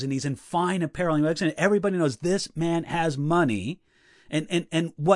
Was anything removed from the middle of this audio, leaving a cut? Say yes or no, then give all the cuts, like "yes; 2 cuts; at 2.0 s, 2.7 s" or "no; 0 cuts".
no; 0 cuts